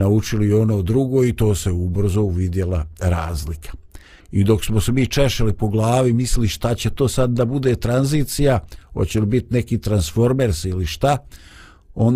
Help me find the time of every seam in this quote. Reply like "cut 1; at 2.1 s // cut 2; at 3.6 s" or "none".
cut 1; at 4.2 s